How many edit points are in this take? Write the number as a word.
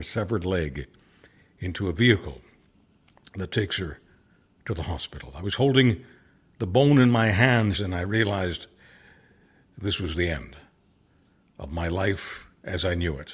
one